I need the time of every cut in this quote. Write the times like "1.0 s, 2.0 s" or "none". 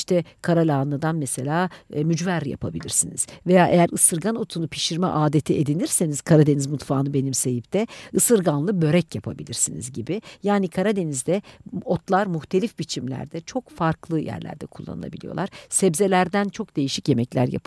none